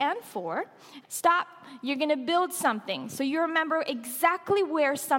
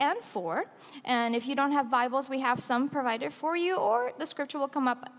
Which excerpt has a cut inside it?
first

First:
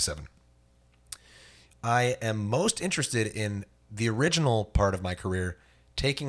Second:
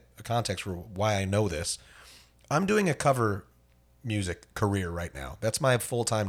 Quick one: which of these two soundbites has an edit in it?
first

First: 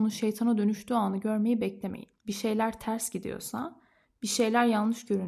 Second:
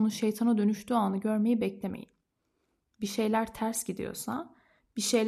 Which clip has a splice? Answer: first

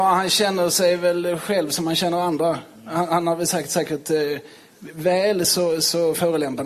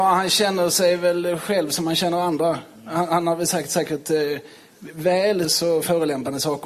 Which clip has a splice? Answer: second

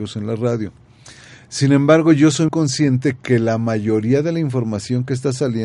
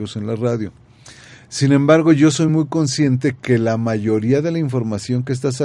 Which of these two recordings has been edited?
first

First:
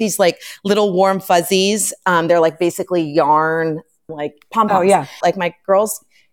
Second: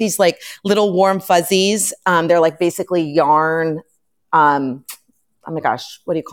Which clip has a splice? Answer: first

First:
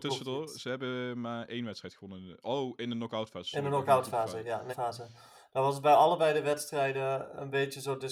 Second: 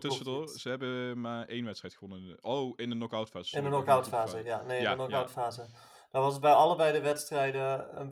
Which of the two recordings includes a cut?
first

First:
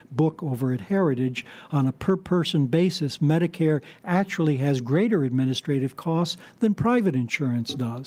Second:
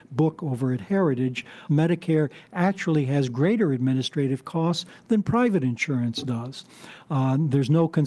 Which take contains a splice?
second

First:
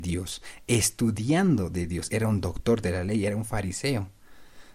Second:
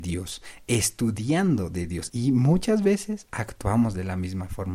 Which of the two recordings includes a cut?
second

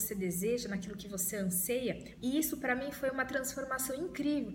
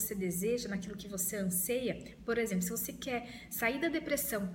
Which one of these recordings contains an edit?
first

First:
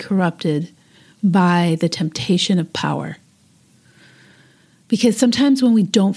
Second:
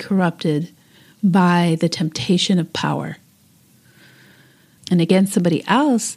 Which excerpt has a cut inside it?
second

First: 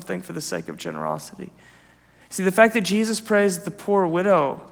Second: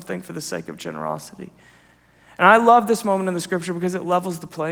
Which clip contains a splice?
first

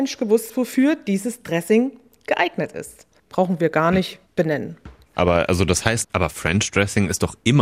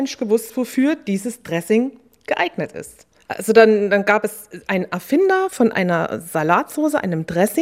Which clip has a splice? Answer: first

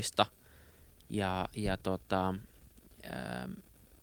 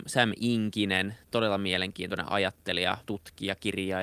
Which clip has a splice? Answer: second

